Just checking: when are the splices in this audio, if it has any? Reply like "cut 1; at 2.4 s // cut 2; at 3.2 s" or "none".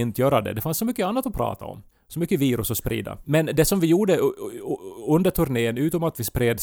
cut 1; at 3.2 s

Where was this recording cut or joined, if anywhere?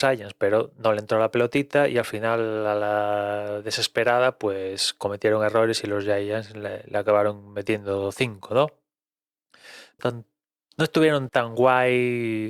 cut 1; at 10.0 s // cut 2; at 11.3 s

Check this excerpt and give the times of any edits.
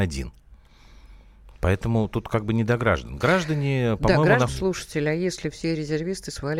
cut 1; at 4.5 s

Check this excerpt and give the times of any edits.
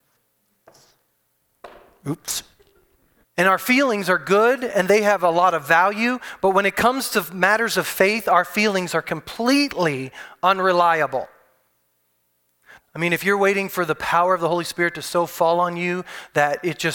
cut 1; at 3.2 s // cut 2; at 12.8 s

